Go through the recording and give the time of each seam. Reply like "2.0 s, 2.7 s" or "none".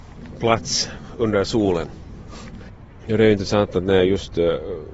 none